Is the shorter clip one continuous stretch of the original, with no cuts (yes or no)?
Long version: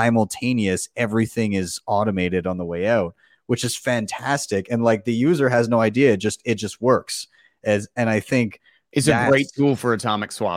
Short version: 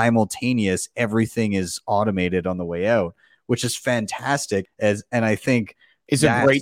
no